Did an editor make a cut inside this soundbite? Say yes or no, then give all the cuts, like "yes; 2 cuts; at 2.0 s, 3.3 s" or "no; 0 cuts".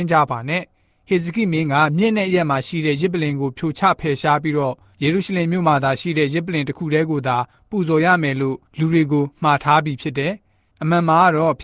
yes; 1 cut; at 8.7 s